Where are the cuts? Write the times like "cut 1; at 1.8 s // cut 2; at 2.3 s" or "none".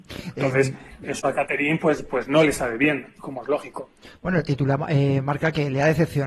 none

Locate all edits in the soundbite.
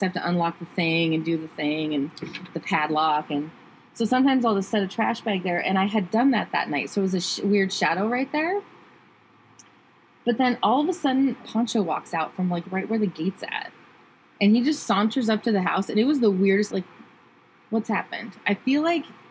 cut 1; at 11.4 s // cut 2; at 16.7 s

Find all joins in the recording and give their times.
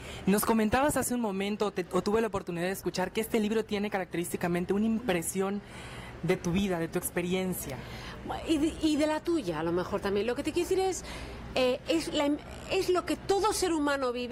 none

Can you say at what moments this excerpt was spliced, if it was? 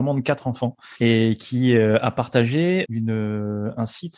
cut 1; at 1.0 s // cut 2; at 2.9 s

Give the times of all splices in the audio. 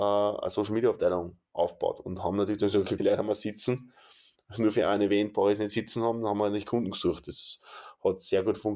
cut 1; at 3.0 s

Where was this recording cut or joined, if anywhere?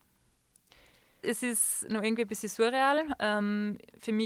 cut 1; at 1.2 s // cut 2; at 3.2 s

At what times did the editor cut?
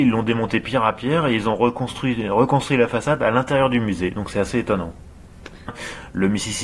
cut 1; at 5.7 s

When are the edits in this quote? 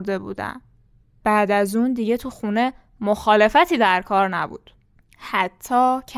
none

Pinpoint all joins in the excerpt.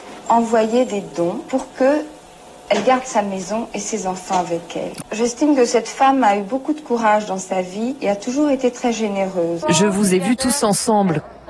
cut 1; at 5.0 s // cut 2; at 9.6 s

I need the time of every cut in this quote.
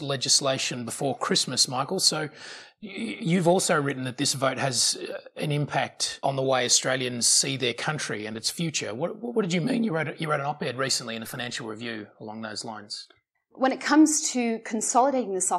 cut 1; at 13.3 s

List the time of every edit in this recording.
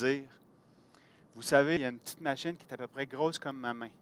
cut 1; at 1.8 s

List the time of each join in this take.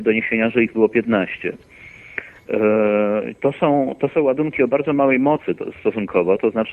none

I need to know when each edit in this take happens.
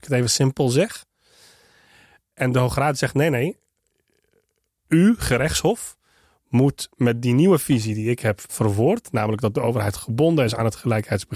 cut 1; at 8.5 s

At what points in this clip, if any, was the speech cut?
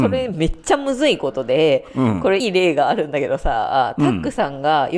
cut 1; at 2.4 s

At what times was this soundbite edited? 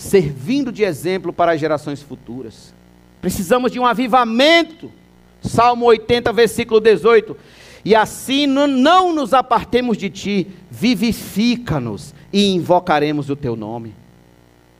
cut 1; at 3.2 s

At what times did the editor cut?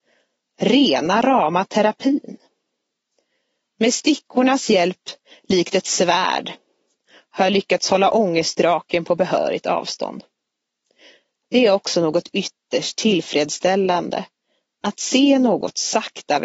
none

